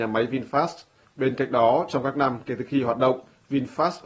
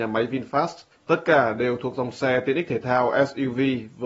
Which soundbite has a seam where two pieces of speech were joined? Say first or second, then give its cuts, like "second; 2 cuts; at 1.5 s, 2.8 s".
second; 1 cut; at 0.9 s